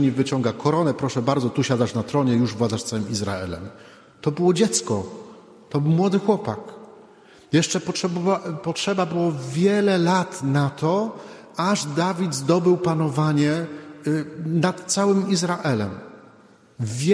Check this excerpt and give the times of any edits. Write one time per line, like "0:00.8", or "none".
none